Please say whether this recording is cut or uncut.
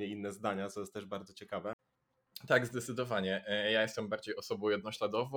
uncut